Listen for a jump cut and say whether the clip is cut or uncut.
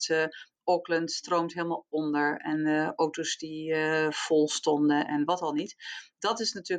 uncut